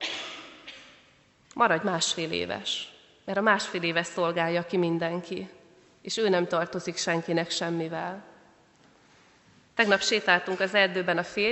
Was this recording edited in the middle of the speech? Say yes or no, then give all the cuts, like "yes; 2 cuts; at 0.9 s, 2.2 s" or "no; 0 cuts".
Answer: yes; 1 cut; at 1.4 s